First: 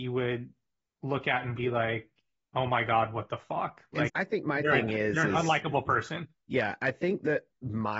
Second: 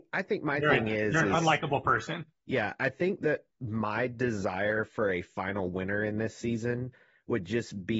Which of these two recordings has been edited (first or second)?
first